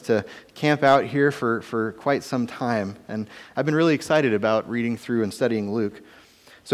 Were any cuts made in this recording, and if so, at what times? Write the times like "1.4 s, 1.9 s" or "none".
none